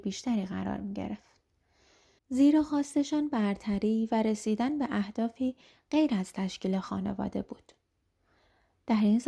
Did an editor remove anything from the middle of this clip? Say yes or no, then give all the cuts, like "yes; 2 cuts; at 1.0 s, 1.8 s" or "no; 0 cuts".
yes; 1 cut; at 2.2 s